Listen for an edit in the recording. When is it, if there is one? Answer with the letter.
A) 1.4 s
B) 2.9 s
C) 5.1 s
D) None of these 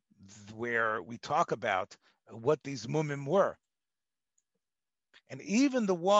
C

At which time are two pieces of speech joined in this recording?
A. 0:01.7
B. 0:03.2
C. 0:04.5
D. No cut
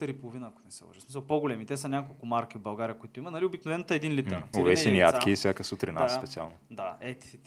C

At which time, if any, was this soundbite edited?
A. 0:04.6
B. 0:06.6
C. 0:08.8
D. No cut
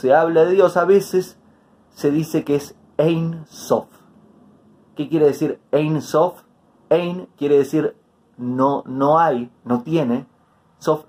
D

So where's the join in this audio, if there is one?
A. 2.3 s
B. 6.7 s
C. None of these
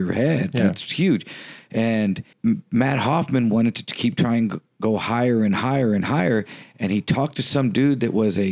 A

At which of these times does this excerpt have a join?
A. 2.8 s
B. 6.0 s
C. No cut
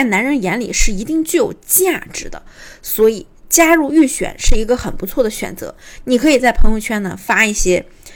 C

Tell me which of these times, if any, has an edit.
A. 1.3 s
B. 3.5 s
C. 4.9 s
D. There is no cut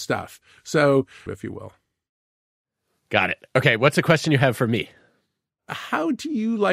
A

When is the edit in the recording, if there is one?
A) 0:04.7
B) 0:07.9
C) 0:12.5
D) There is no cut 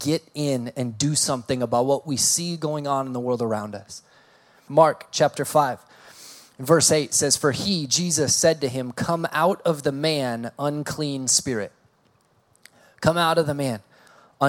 A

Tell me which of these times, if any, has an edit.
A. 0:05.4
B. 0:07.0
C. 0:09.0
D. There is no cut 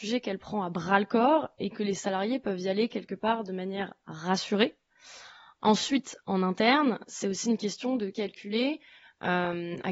D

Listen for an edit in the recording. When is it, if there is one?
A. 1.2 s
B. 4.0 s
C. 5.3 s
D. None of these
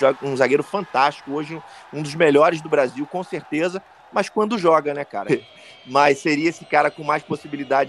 C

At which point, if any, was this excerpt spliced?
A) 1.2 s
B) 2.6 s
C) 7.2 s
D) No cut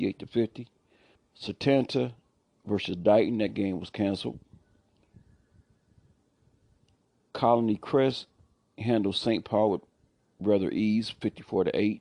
A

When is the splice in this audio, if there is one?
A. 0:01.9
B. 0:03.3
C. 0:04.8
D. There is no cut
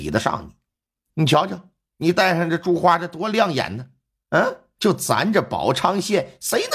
C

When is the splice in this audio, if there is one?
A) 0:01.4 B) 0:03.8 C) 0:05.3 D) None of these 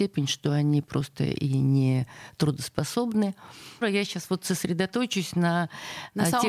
B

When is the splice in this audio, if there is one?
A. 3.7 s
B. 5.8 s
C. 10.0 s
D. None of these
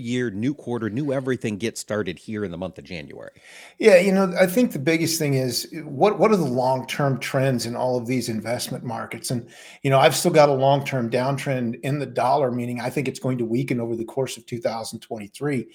D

